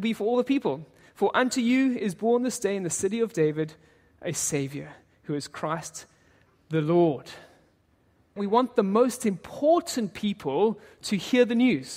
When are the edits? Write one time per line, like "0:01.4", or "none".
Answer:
0:08.4